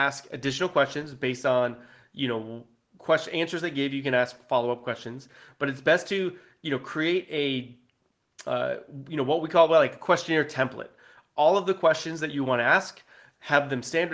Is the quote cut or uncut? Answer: uncut